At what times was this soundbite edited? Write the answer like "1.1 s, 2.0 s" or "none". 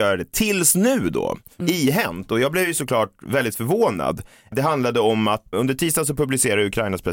1.6 s, 5.5 s